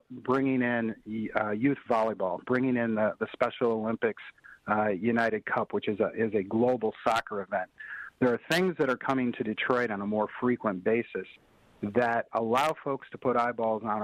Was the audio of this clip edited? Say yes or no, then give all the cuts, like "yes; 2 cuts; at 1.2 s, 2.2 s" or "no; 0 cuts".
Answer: no; 0 cuts